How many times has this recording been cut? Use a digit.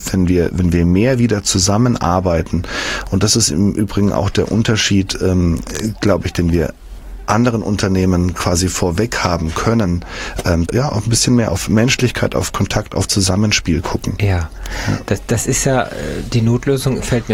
1